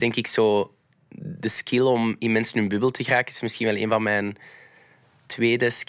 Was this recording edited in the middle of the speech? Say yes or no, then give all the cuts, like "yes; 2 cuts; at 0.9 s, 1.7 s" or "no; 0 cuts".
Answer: no; 0 cuts